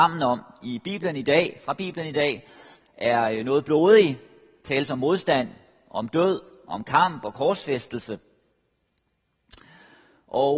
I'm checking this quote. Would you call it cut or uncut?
uncut